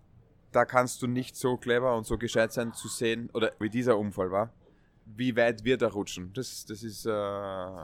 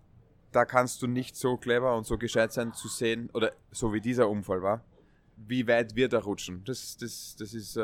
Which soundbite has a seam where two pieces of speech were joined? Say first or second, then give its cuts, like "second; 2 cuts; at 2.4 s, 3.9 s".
first; 2 cuts; at 3.6 s, 6.6 s